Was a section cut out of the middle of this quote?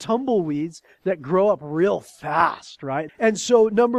yes; 1 cut; at 3.1 s

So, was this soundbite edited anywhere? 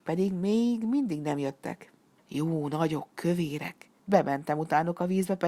yes; 2 cuts; at 2.2 s, 4.0 s

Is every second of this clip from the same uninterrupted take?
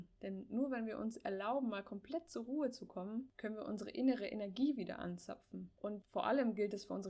no; 1 cut; at 5.7 s

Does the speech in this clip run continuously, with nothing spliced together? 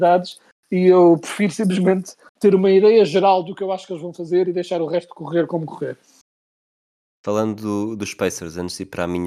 yes; 0 cuts

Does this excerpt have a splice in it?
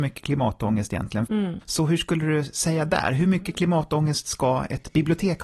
yes; 1 cut; at 1.3 s

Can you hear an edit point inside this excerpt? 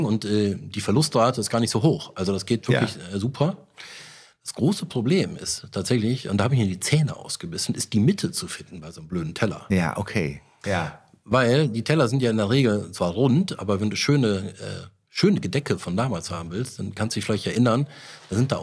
no; 0 cuts

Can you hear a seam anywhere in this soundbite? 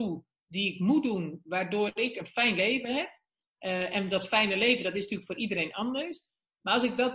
no; 0 cuts

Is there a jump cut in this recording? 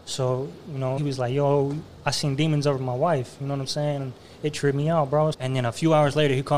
yes; 2 cuts; at 1.0 s, 5.3 s

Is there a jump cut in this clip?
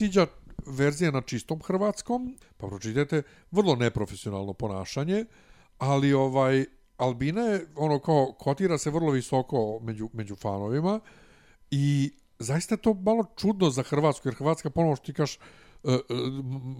yes; 1 cut; at 2.4 s

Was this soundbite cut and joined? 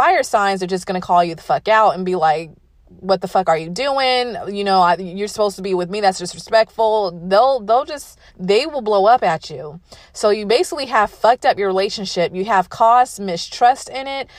yes; 1 cut; at 8.3 s

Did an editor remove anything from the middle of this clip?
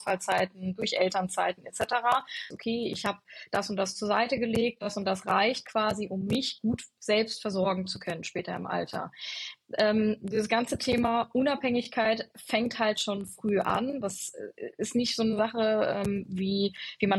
yes; 1 cut; at 2.5 s

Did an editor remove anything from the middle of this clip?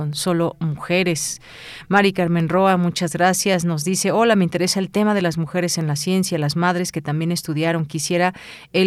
no; 0 cuts

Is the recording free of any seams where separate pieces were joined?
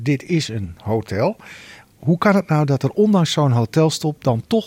yes; 0 cuts

